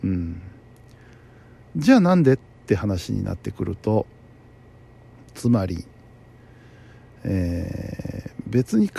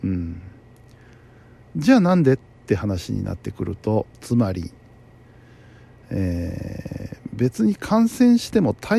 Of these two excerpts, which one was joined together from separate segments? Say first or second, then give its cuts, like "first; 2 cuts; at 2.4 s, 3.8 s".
second; 1 cut; at 4.1 s